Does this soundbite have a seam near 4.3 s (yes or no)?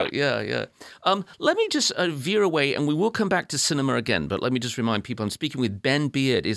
no